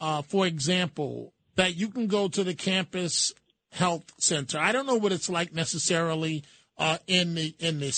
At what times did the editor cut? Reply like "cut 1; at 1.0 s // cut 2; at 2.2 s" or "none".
cut 1; at 1.4 s